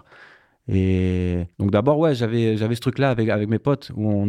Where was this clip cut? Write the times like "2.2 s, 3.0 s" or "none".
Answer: 1.5 s